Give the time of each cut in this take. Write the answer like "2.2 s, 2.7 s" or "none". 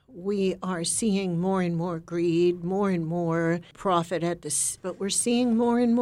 4.8 s